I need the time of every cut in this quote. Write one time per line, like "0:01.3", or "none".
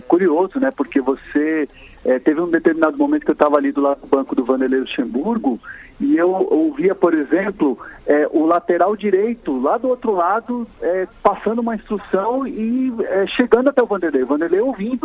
0:11.2